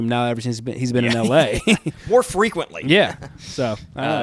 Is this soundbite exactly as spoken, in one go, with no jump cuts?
yes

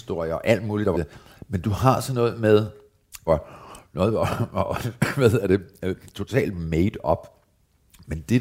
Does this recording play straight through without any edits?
no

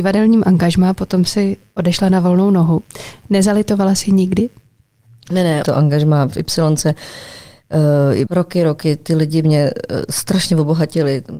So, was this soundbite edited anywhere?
yes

